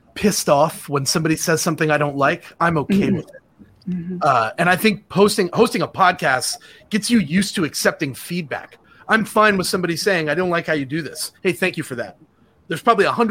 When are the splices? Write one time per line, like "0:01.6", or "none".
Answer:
none